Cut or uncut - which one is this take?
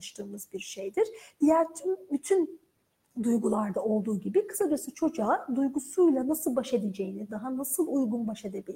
uncut